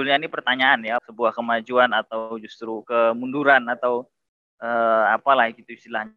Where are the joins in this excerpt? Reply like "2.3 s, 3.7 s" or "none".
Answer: 1.0 s